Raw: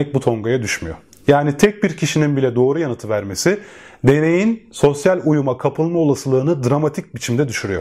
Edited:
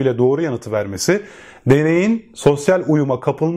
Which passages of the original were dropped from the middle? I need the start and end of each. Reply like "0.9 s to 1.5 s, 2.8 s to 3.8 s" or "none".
none